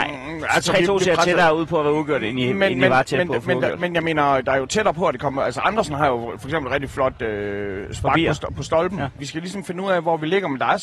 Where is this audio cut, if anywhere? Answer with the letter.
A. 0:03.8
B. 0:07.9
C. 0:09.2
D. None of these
C